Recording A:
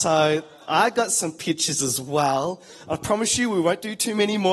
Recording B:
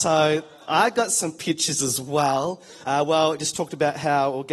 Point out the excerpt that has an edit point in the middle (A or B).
B